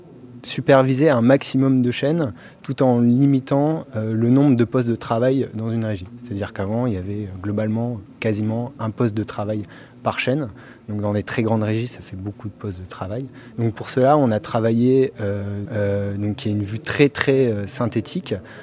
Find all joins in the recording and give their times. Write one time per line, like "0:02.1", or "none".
0:13.5
0:15.7